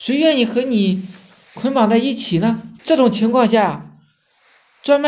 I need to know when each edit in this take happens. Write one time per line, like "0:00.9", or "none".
0:02.8